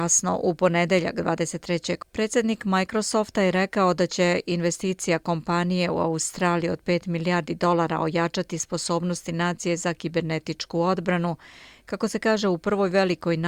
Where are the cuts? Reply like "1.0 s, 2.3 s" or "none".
2.0 s